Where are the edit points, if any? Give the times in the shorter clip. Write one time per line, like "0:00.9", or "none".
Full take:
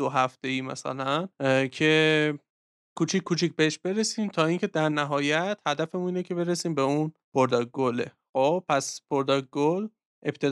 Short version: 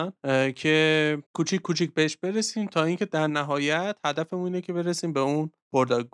0:01.3